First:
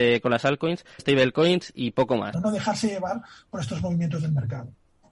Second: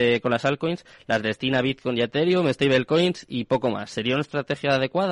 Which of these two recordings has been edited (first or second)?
first